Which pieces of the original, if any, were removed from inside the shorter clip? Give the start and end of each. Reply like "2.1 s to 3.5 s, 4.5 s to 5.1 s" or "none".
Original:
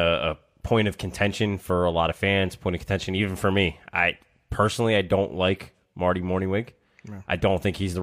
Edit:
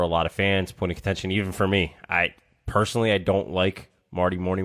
none

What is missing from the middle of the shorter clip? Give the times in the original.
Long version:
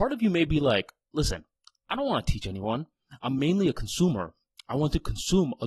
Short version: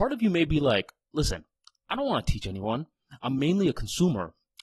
none

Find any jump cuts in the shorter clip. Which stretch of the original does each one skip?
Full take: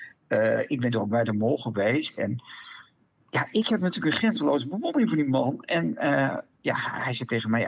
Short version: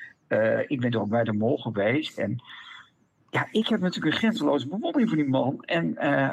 none

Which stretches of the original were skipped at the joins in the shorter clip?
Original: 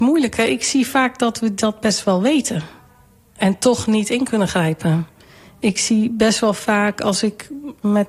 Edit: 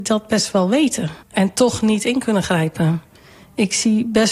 2.7 s to 3.3 s

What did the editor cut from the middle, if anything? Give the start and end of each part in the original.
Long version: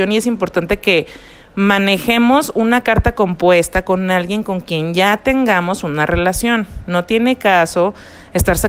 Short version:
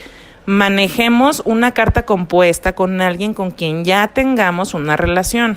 none

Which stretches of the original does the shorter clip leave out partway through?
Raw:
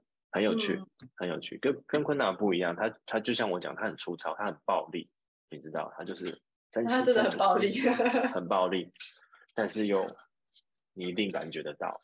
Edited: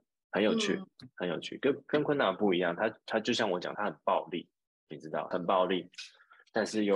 3.7 s to 4.4 s, 5.9 s to 8.3 s

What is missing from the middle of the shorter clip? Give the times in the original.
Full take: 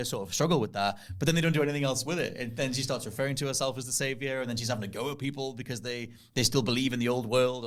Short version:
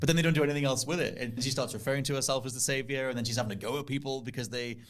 2.6 s to 2.7 s

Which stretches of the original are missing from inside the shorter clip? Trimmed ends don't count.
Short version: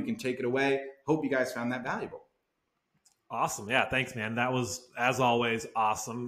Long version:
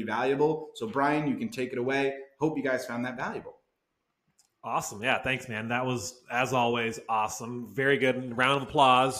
none

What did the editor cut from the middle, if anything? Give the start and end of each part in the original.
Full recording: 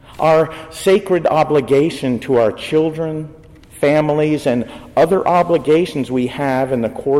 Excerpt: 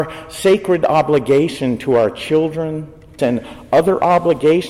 3.6 s to 4.4 s

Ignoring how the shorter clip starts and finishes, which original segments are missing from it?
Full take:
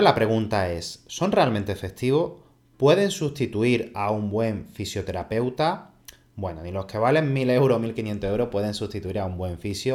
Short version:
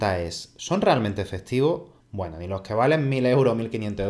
2.5 s to 6.2 s

